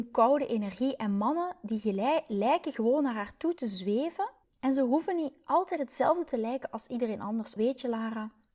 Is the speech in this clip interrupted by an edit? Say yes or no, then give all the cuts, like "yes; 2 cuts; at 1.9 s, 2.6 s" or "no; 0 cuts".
yes; 2 cuts; at 4.4 s, 7.6 s